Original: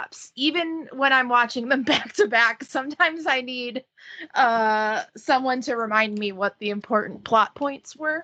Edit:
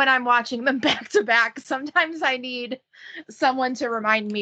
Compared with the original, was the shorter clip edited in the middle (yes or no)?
yes